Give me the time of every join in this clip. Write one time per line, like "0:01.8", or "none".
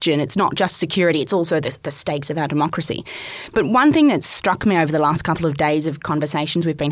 none